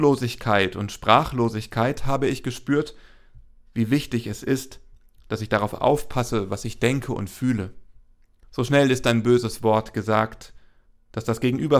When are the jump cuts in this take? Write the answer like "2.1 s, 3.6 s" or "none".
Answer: 8.4 s